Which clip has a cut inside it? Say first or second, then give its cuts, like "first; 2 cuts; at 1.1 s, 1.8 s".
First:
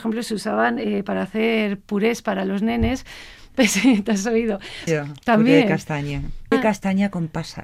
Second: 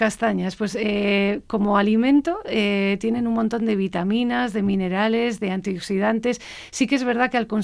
first; 2 cuts; at 4.9 s, 6.5 s